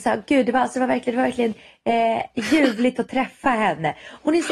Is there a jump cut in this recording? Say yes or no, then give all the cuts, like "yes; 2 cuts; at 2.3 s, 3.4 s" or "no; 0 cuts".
no; 0 cuts